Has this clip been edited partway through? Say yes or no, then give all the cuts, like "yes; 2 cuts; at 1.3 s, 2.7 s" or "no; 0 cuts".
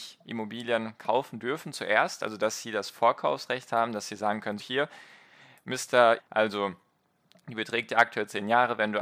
yes; 2 cuts; at 4.6 s, 6.2 s